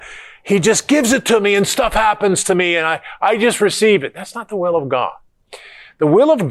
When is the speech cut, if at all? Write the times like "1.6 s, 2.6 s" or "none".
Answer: none